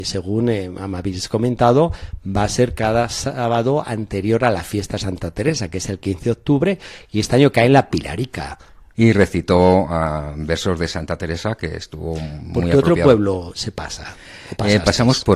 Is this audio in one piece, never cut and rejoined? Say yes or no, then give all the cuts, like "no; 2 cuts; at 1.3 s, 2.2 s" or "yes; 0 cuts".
no; 1 cut; at 8.9 s